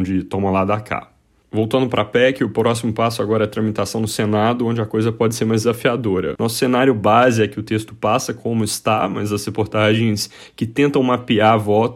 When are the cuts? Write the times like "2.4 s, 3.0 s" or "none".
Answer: 6.4 s